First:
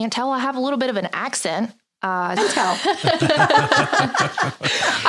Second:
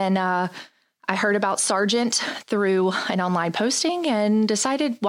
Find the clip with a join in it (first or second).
first